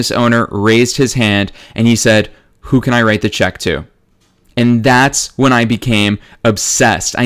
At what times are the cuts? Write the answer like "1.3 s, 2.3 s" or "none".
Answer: none